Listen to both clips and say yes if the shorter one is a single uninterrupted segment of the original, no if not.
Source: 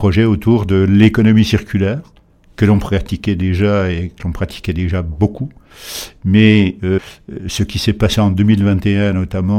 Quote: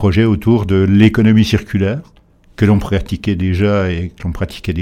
yes